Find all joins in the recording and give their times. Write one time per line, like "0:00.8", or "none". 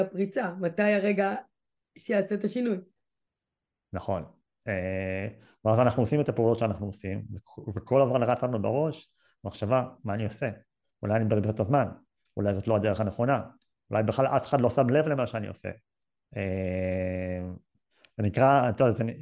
none